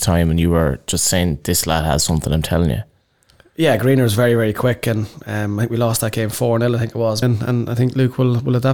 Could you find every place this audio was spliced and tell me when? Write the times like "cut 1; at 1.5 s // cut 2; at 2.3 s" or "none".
cut 1; at 7.2 s